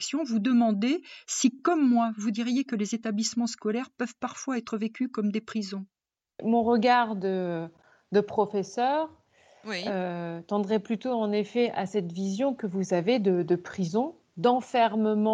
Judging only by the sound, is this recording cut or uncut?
uncut